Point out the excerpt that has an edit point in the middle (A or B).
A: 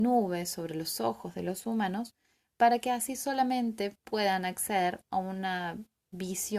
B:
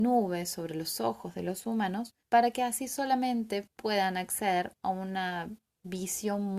B